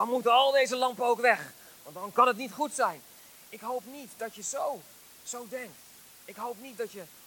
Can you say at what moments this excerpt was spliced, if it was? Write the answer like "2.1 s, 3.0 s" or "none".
none